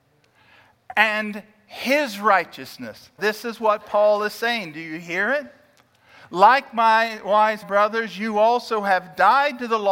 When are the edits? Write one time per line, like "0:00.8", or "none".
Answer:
0:03.2
0:07.6